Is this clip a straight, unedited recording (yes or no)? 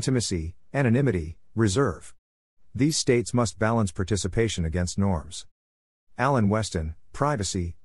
no